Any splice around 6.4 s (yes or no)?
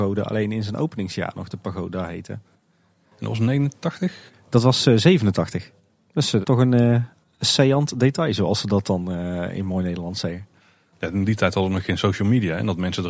yes